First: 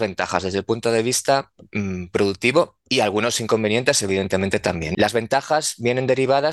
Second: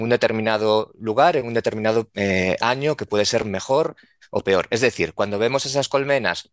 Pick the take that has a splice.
first; 1 cut; at 4.9 s

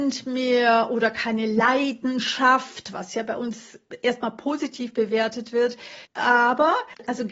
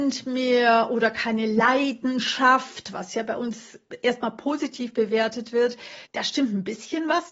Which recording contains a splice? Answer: first; 1 cut; at 6.1 s

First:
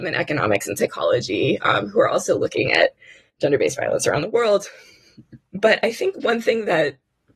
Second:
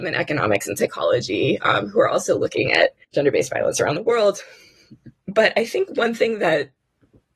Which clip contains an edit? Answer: second; 1 cut; at 3.0 s

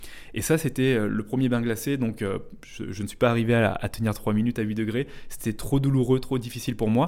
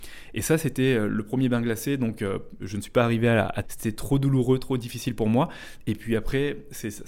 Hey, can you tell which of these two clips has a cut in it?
second; 2 cuts; at 2.6 s, 3.6 s

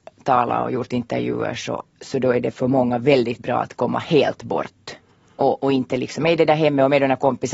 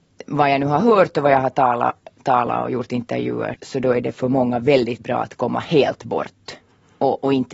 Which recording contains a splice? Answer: second; 1 cut; at 3.5 s

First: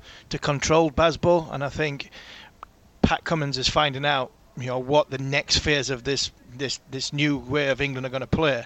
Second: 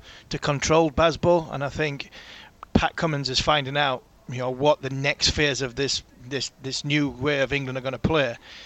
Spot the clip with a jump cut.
second; 1 cut; at 2.7 s

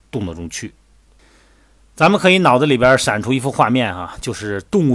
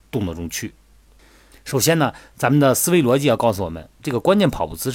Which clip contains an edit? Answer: second; 1 cut; at 1.5 s

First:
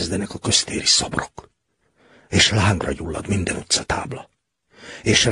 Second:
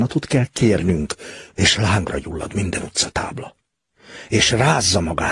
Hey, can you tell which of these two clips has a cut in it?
second; 1 cut; at 1.5 s

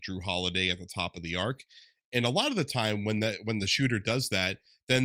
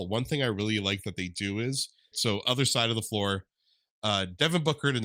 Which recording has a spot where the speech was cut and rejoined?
second; 1 cut; at 2.1 s

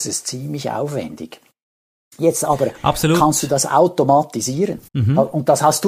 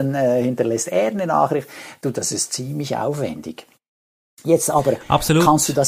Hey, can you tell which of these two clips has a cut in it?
first; 1 cut; at 4.9 s

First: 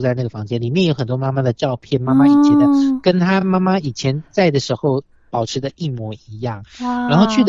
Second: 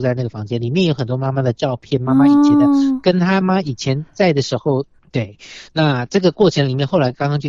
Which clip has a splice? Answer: second; 2 cuts; at 3.4 s, 5.0 s

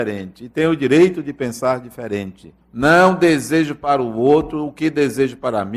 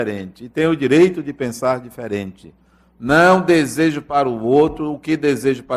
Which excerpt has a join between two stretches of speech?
first; 1 cut; at 2.6 s

